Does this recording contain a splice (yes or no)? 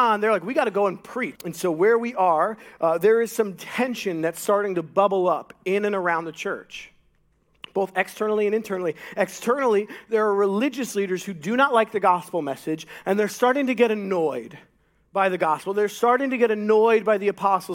yes